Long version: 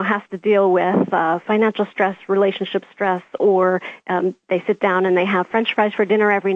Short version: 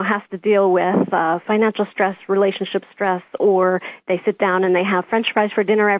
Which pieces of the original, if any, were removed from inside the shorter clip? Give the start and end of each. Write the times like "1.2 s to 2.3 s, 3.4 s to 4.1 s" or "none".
4.0 s to 4.4 s